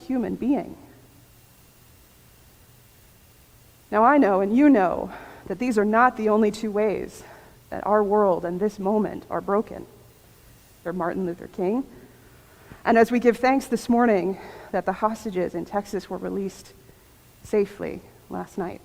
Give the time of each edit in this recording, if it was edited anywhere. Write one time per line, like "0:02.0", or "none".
0:10.8